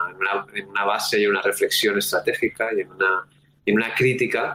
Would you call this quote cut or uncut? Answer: uncut